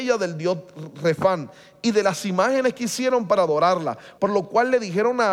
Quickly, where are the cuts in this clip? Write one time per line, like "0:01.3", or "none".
0:04.2